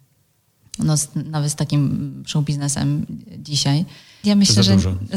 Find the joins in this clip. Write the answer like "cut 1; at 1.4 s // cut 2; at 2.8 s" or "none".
cut 1; at 4.2 s